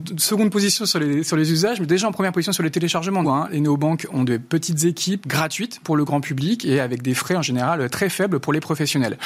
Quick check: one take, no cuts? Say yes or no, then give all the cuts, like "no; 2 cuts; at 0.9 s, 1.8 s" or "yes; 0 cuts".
no; 2 cuts; at 3.2 s, 5.2 s